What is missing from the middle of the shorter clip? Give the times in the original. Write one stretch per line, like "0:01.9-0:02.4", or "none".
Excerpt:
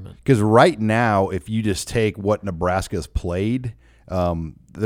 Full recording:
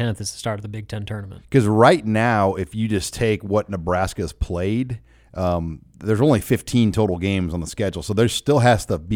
none